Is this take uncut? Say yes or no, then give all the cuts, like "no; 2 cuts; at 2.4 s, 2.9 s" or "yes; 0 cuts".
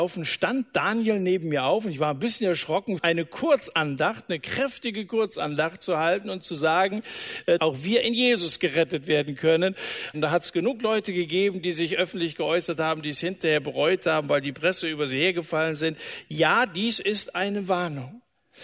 no; 3 cuts; at 3.0 s, 7.6 s, 10.1 s